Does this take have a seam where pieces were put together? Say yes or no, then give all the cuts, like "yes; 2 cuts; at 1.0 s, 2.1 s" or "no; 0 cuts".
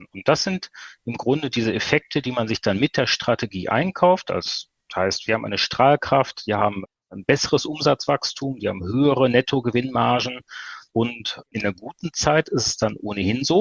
yes; 2 cuts; at 5.3 s, 11.5 s